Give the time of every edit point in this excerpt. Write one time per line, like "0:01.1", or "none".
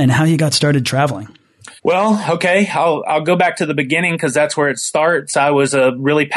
0:01.8